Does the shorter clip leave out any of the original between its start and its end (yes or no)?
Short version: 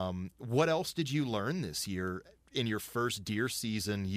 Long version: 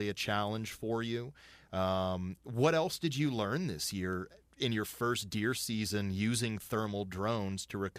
no